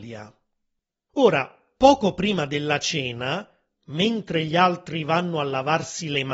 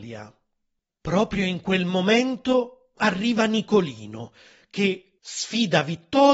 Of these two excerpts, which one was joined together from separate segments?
second; 2 cuts; at 1.0 s, 5.2 s

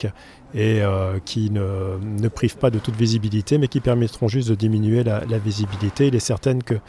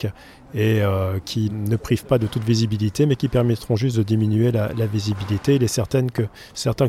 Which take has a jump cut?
second; 1 cut; at 1.5 s

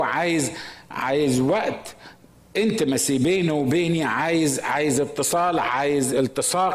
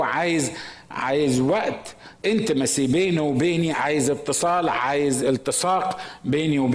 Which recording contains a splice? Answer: second; 2 cuts; at 2.2 s, 3.7 s

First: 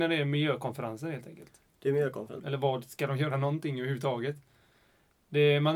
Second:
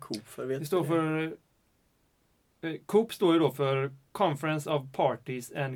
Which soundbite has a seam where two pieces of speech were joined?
first; 1 cut; at 2.4 s

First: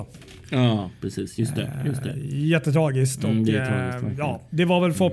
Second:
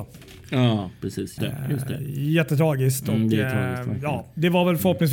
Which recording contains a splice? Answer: second; 1 cut; at 1.4 s

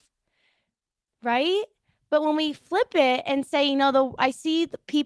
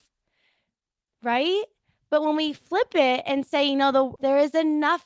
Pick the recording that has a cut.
second; 1 cut; at 4.2 s

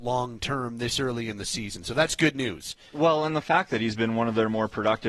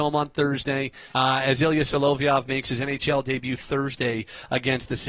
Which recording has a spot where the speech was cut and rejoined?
second; 1 cut; at 1.1 s

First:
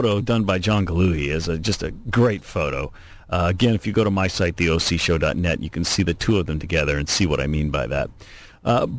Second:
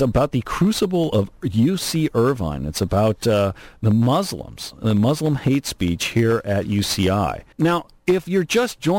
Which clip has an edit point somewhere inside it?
second; 1 cut; at 7.5 s

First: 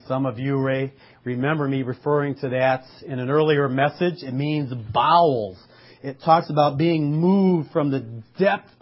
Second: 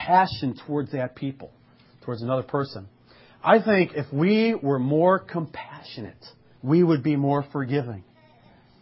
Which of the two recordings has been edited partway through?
second; 1 cut; at 6.6 s

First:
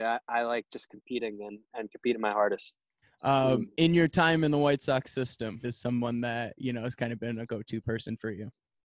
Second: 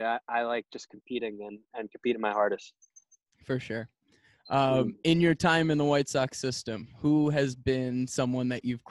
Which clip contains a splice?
first; 2 cuts; at 3.0 s, 5.6 s

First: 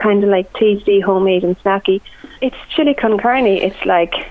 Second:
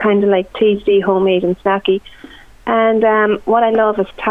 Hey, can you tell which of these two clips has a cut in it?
first; 1 cut; at 2.4 s

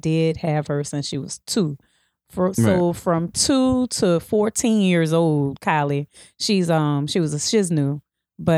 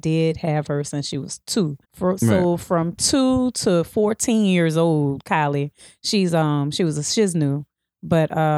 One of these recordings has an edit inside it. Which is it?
second; 1 cut; at 1.8 s

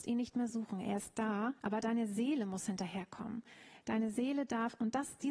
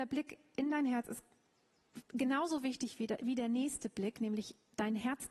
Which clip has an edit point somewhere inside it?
first; 1 cut; at 1.6 s

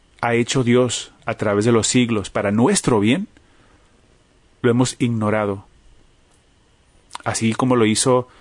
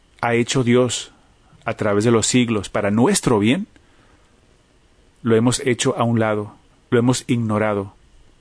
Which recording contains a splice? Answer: first; 2 cuts; at 1.2 s, 4.6 s

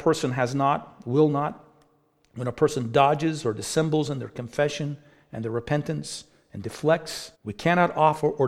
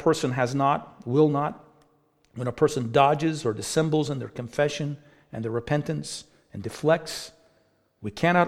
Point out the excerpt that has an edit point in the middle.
first; 1 cut; at 7.3 s

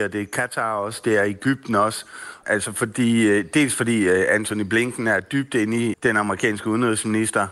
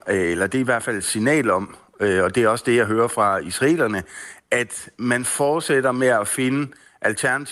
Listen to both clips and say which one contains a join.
first; 2 cuts; at 2.4 s, 5.9 s

